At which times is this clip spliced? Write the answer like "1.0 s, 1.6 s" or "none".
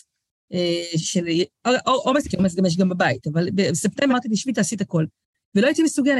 2.2 s, 4.1 s